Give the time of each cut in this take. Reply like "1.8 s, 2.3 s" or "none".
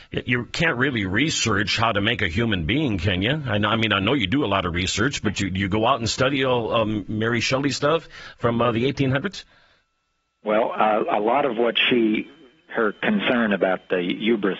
none